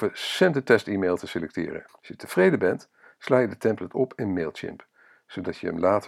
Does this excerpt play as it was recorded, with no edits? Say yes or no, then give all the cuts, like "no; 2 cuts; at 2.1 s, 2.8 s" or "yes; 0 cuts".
no; 1 cut; at 1.9 s